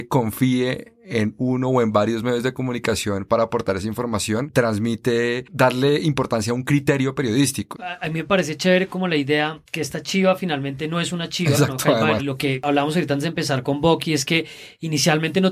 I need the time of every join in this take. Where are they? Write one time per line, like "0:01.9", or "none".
0:07.7
0:12.2